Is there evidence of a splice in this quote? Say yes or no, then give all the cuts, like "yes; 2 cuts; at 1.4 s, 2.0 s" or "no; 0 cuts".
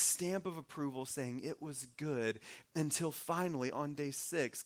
no; 0 cuts